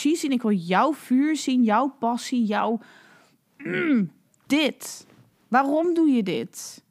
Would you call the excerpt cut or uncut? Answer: uncut